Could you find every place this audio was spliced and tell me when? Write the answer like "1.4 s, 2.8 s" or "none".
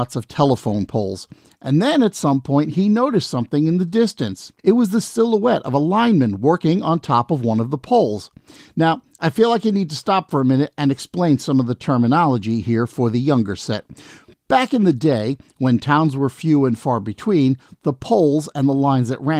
4.6 s